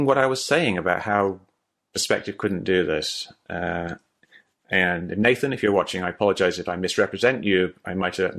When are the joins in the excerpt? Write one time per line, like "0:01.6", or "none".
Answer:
none